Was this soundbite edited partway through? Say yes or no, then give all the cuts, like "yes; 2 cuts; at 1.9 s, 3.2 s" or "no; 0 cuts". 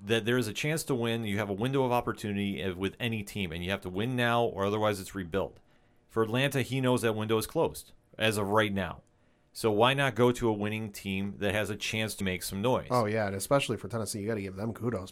yes; 1 cut; at 12.2 s